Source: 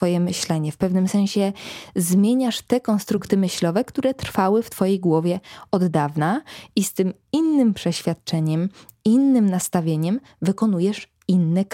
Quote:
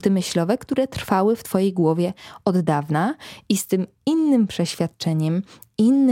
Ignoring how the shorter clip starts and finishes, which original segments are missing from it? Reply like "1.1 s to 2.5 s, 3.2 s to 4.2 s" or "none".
none